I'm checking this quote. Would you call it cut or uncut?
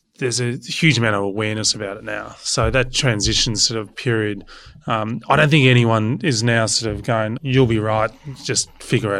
cut